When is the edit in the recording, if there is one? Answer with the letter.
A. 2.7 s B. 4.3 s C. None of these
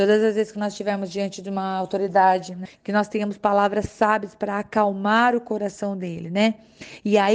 A